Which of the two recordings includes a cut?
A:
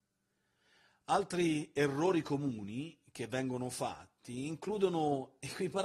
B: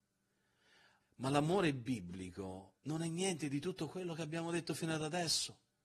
B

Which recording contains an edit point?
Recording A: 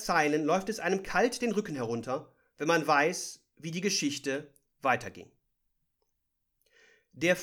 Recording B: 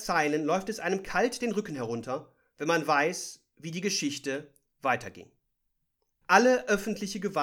B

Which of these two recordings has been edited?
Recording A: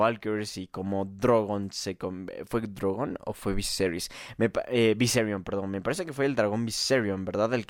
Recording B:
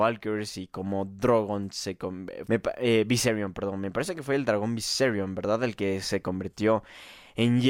B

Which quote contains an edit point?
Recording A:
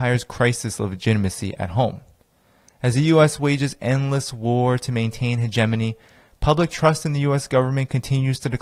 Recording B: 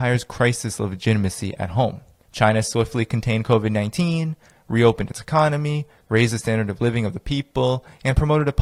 B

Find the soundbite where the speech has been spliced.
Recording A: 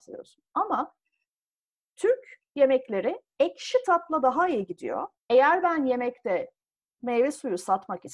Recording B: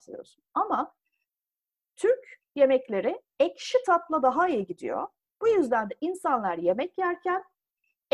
A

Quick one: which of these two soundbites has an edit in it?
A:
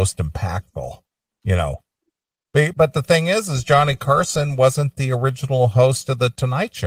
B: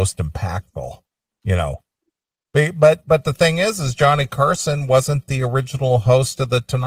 A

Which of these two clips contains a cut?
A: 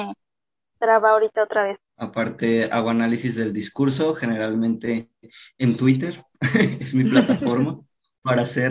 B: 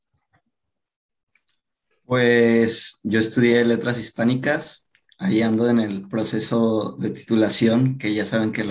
A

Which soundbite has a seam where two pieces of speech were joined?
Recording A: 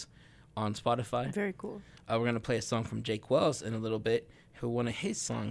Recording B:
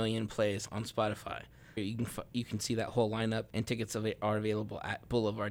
B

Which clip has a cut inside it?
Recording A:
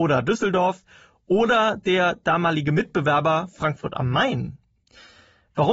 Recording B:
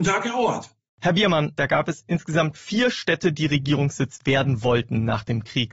B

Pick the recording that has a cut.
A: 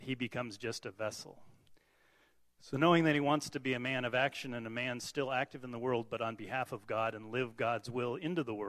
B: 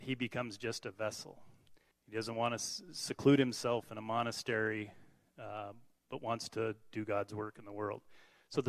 B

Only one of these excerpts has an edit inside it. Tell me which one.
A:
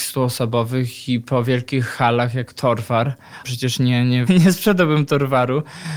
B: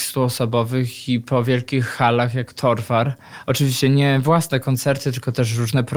A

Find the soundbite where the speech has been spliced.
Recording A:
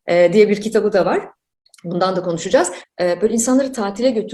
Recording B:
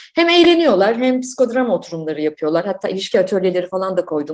A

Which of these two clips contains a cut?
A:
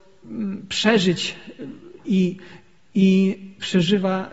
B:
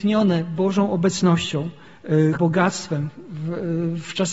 B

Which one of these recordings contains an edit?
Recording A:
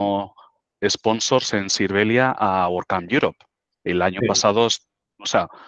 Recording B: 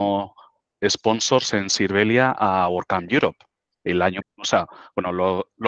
B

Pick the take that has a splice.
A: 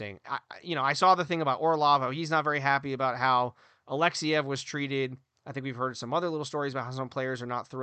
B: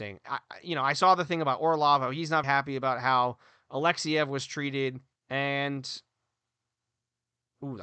B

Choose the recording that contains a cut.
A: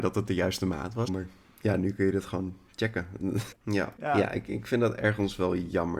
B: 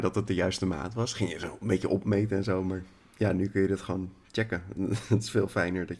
A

